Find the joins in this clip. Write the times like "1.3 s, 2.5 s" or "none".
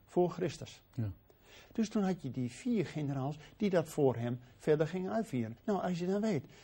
1.7 s, 5.6 s